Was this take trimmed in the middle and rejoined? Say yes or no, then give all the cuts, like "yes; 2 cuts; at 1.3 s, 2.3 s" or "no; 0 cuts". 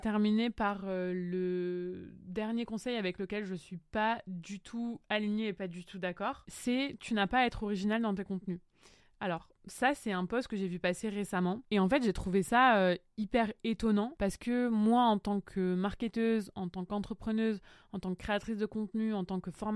no; 0 cuts